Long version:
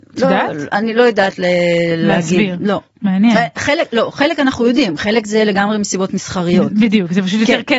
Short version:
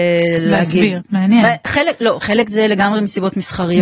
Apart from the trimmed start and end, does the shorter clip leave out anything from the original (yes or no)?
yes